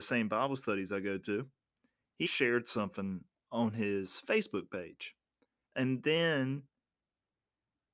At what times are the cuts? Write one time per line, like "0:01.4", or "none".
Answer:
0:02.3
0:05.7